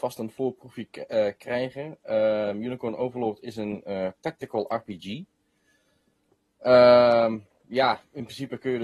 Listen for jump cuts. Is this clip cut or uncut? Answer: uncut